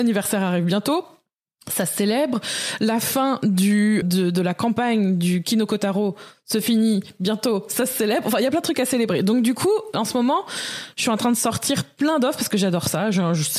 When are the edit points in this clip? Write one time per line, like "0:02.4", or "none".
0:04.0